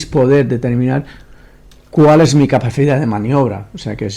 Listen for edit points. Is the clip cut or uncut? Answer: uncut